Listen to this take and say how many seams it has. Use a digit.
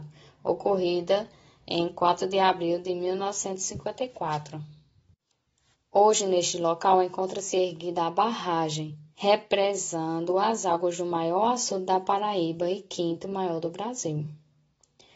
2